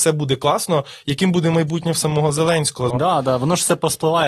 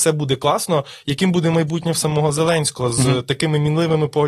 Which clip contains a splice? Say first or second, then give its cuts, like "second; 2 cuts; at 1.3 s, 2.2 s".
first; 1 cut; at 2.9 s